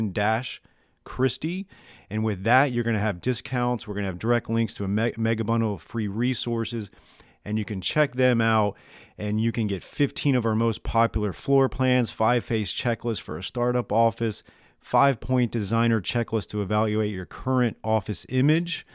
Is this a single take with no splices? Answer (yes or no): yes